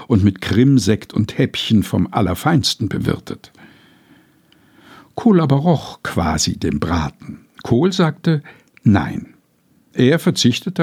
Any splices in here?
no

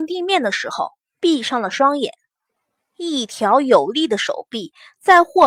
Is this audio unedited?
no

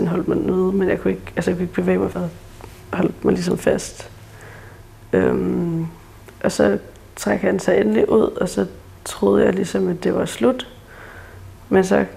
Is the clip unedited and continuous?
no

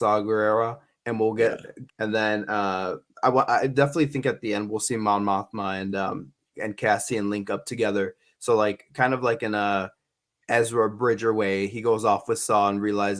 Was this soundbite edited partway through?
yes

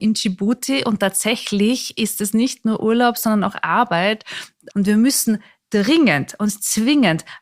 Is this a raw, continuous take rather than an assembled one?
no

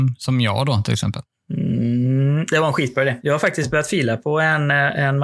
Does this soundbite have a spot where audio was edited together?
yes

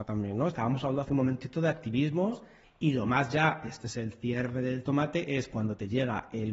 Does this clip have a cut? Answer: yes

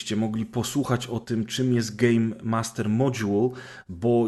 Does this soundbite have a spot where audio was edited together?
no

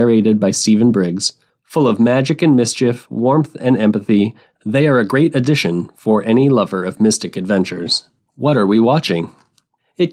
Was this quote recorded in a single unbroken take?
yes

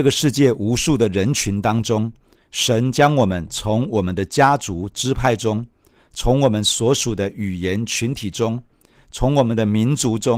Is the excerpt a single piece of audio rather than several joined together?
yes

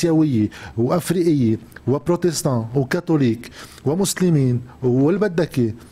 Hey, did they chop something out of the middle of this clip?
no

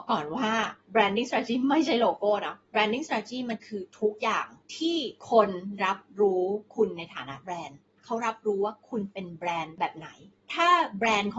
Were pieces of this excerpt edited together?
no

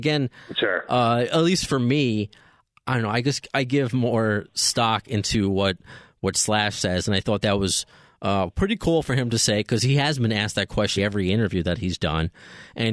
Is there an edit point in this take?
yes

